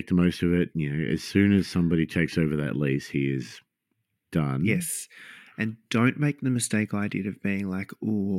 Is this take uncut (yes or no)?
yes